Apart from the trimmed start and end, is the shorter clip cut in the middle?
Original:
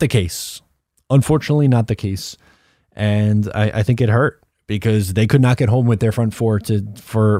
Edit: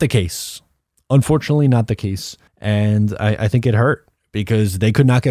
yes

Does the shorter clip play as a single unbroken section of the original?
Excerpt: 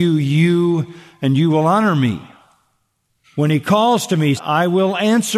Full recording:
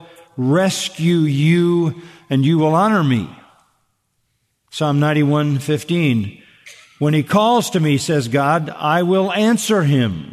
no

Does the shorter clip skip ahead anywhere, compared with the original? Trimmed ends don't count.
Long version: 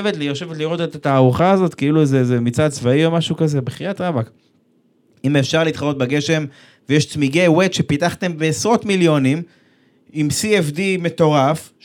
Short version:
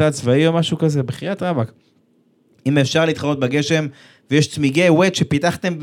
no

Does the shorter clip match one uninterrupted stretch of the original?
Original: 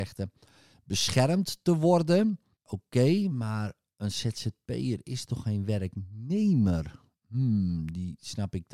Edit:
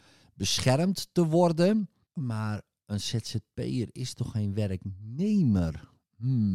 no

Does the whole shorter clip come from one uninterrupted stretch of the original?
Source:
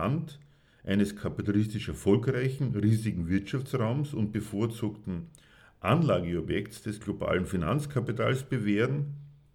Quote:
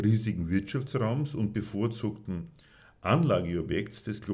yes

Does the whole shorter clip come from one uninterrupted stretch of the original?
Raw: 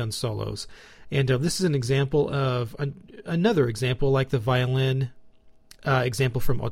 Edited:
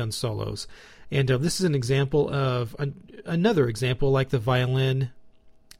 yes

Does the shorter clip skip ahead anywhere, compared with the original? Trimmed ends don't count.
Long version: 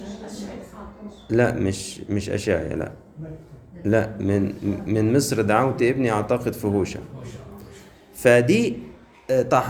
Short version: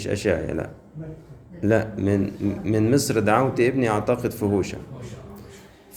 no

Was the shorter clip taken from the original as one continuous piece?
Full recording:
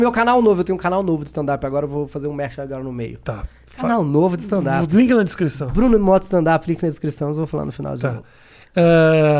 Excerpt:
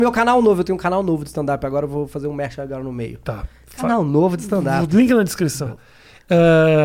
no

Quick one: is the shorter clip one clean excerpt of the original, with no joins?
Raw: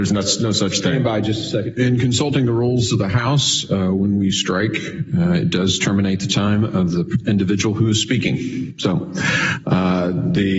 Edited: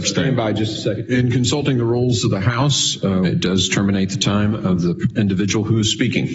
no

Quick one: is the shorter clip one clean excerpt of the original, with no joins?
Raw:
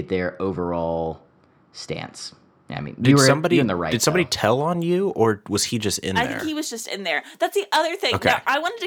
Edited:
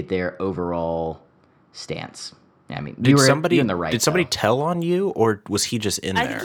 yes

